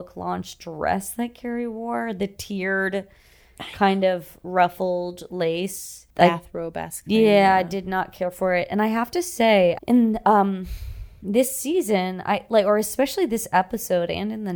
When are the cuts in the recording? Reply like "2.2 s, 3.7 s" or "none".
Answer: 6.1 s, 9.8 s